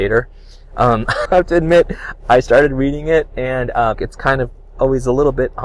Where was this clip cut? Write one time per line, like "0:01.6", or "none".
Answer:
0:01.3
0:03.9